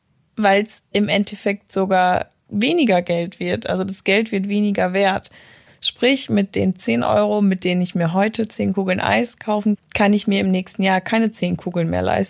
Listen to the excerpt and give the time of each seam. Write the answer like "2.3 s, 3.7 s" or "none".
5.7 s, 9.8 s